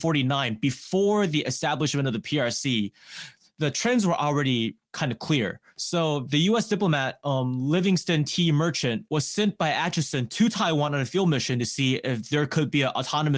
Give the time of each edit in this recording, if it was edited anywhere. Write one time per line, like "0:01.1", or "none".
0:09.1